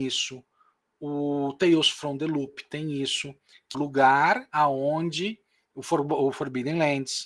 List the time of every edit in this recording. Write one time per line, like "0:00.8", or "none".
0:03.7